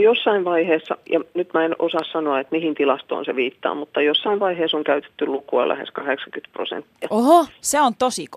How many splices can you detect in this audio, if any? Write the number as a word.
zero